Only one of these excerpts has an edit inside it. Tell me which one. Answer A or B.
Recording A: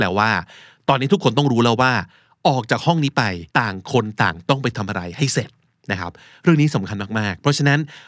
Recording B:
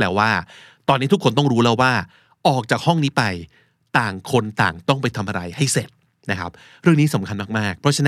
A